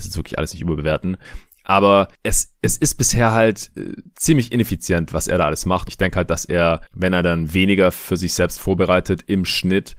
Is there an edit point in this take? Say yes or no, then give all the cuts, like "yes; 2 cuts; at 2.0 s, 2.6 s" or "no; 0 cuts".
yes; 1 cut; at 5.9 s